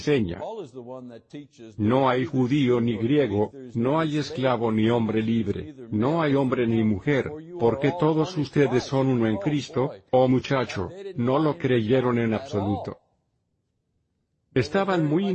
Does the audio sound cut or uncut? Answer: uncut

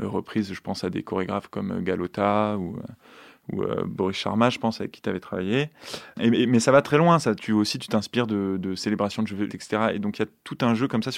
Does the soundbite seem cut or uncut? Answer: cut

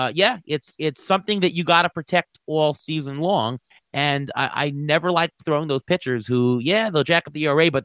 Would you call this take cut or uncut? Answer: uncut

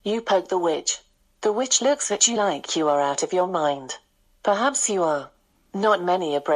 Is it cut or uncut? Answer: uncut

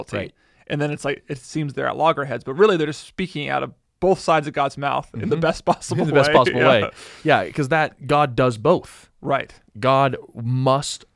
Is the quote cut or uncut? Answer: uncut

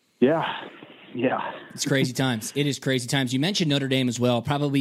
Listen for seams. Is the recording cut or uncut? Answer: uncut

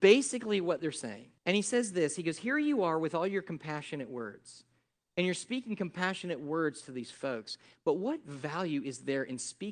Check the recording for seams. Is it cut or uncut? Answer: cut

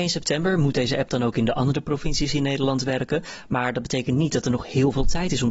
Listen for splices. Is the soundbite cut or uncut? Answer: uncut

